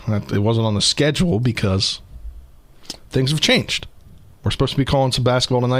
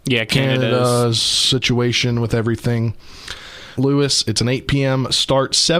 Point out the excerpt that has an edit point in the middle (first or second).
second